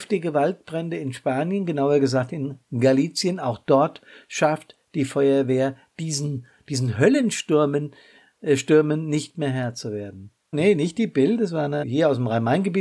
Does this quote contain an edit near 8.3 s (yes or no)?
no